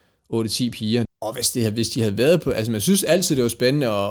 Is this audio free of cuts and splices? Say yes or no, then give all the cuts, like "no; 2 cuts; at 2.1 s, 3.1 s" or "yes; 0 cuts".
no; 1 cut; at 1.1 s